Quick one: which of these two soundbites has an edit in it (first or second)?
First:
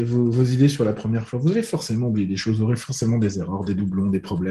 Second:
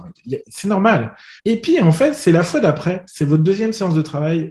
second